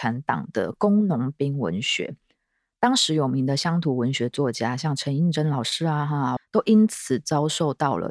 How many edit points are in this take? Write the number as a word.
one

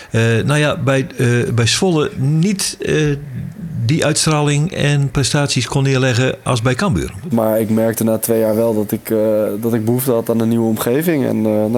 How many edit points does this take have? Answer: one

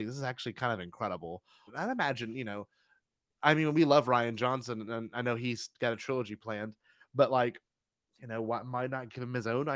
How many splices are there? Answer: one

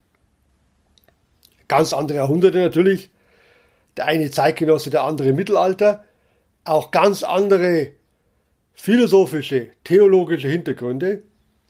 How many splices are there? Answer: zero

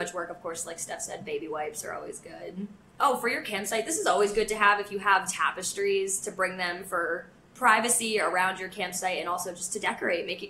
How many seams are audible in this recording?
zero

